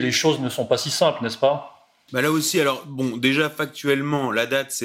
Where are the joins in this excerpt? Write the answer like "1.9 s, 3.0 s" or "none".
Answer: none

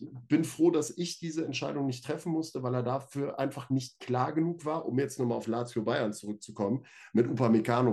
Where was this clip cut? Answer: none

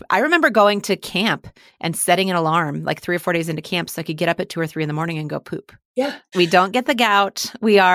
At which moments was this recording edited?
6.3 s

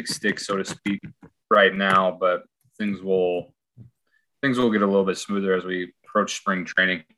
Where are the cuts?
none

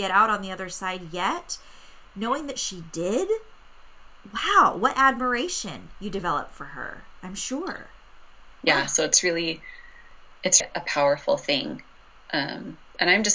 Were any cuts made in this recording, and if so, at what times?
8.6 s, 10.6 s

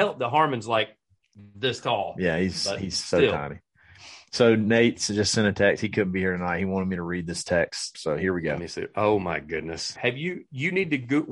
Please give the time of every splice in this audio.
7.9 s, 10.0 s

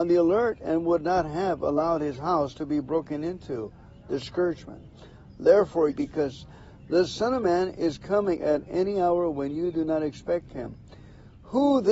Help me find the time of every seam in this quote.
5.9 s

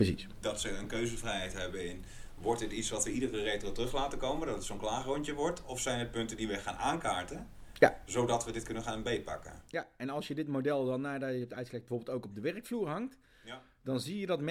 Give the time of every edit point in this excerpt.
none

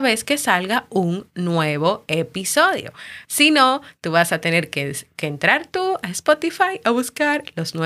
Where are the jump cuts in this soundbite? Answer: 3.2 s

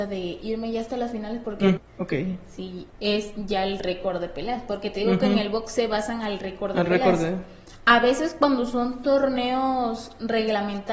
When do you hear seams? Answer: 1.8 s, 2.9 s

